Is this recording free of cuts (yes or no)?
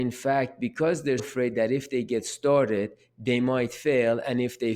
no